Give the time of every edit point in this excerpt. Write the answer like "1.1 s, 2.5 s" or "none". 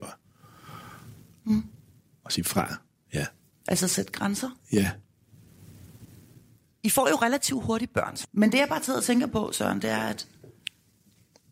1.3 s, 8.2 s